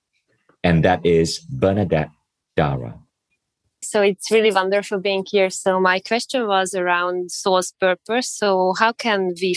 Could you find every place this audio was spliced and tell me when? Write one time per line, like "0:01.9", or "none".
0:03.8